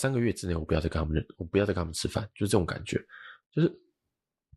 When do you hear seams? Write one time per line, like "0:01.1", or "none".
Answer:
0:03.4